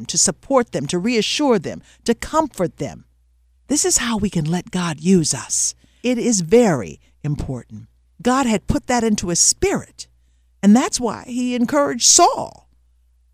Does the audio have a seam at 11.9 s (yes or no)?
no